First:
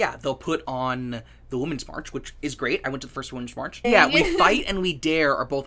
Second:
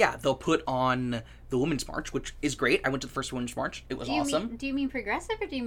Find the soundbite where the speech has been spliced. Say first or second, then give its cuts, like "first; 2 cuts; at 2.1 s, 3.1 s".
first; 1 cut; at 3.8 s